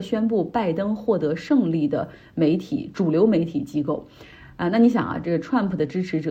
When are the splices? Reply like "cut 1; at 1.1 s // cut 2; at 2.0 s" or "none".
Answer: none